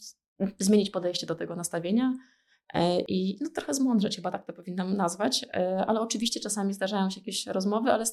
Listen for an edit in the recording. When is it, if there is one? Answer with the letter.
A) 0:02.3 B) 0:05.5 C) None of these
C